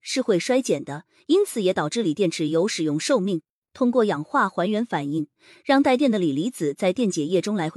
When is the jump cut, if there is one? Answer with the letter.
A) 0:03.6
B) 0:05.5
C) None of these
A